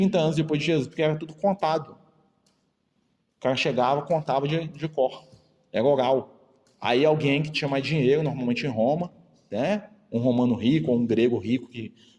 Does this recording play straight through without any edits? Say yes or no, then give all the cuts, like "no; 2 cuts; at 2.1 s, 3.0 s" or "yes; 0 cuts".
yes; 0 cuts